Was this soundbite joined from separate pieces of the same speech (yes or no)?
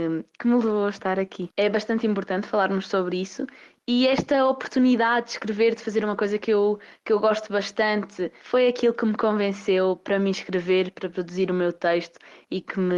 yes